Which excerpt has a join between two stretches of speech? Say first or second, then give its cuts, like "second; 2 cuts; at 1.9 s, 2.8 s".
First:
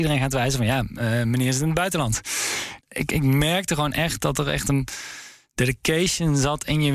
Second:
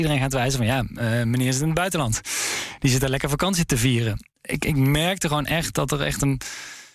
first; 1 cut; at 2.8 s